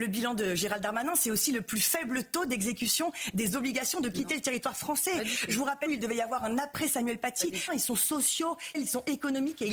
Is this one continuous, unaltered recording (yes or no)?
no